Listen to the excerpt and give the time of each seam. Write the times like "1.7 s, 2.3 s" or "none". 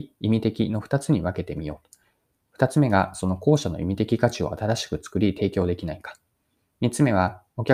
none